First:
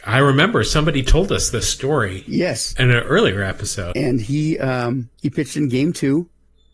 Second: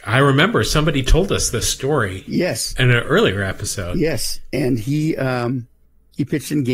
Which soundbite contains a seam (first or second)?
first